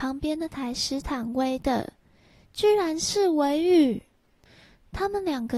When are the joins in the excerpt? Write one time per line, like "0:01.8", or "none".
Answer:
none